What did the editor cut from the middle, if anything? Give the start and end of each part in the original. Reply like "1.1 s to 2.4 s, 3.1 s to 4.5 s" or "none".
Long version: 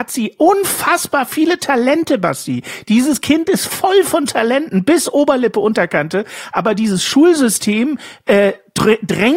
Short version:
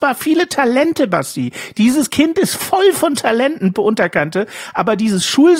4.8 s to 5.5 s